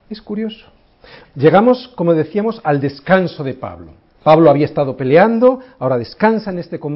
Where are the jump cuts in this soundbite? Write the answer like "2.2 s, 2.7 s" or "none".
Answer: 1.2 s